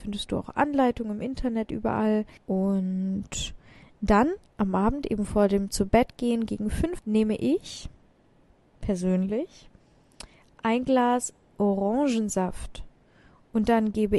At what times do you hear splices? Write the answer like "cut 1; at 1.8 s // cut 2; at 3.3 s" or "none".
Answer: cut 1; at 2.4 s // cut 2; at 7.0 s